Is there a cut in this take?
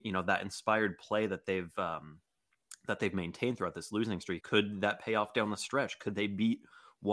yes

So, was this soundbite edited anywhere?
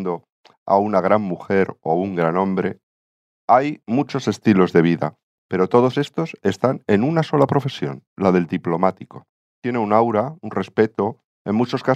no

